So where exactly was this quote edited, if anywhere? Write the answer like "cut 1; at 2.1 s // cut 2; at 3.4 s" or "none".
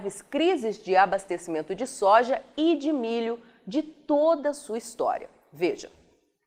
none